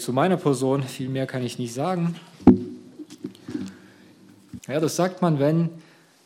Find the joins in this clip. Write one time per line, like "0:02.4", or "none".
0:04.6

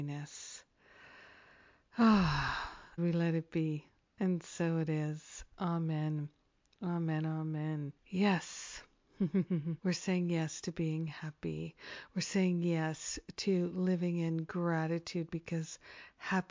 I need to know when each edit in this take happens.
0:03.0
0:08.0
0:09.8

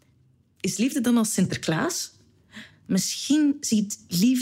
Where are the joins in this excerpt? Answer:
0:02.7

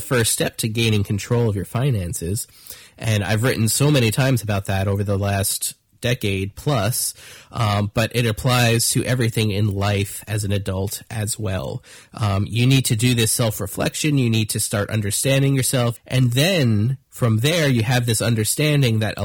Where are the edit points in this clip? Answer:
0:16.0
0:17.0

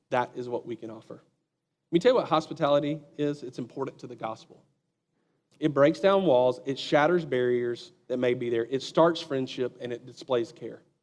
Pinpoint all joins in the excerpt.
none

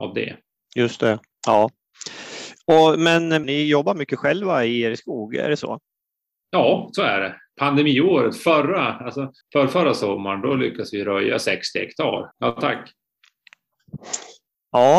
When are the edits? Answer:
0:03.4
0:09.4
0:12.3

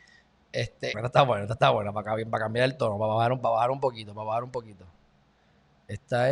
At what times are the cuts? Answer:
0:00.9

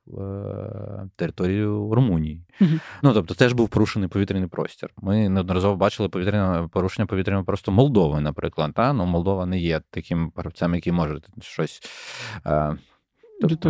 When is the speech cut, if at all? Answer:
none

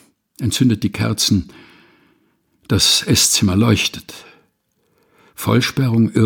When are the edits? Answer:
0:05.3

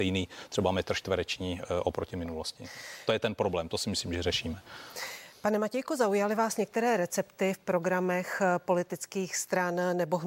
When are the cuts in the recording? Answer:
none

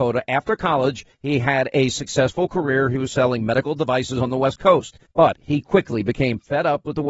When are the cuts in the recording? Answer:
none

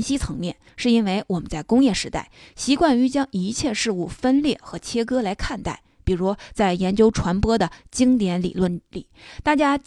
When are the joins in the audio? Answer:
none

